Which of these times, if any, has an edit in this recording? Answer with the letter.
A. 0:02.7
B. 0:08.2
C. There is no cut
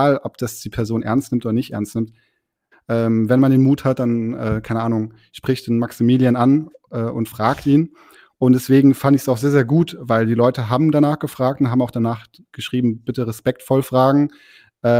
A